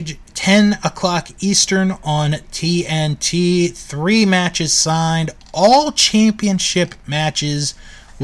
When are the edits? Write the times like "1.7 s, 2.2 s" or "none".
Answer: none